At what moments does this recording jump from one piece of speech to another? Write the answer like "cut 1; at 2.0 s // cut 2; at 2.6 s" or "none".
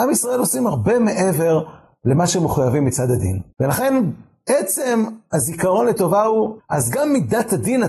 cut 1; at 3.5 s // cut 2; at 6.6 s